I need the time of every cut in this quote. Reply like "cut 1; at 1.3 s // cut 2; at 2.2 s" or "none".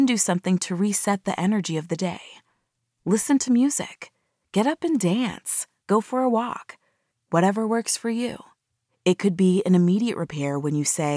cut 1; at 7.1 s // cut 2; at 8.8 s

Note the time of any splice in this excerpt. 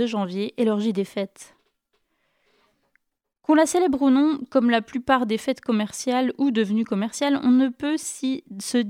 none

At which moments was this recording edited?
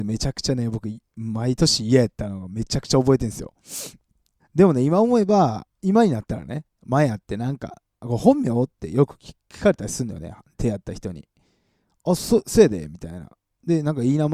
cut 1; at 4.4 s

